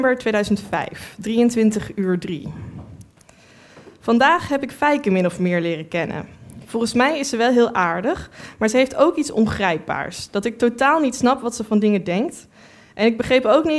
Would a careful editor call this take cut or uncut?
uncut